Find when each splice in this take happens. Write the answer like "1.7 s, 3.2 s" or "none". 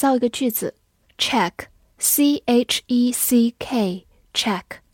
1.0 s